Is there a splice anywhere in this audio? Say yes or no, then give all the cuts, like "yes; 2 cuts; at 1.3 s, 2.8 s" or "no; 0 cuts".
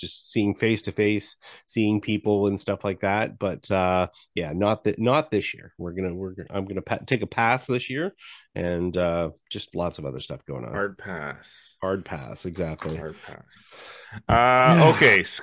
no; 0 cuts